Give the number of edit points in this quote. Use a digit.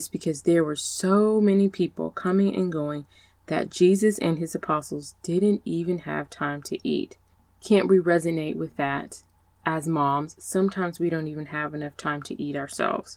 0